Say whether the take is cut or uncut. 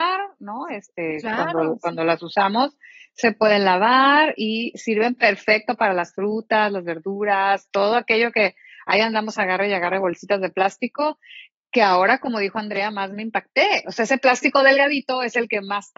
uncut